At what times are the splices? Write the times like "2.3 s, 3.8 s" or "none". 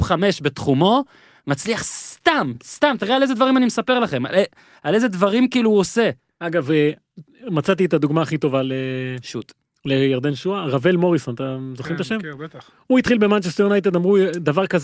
none